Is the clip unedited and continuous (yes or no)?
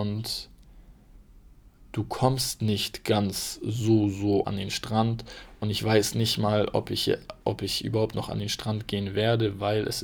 no